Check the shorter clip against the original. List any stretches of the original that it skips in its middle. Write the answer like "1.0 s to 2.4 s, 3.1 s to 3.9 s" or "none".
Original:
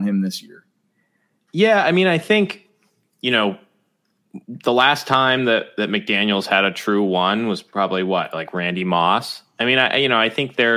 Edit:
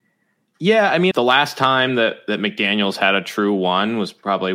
2.0 s to 4.6 s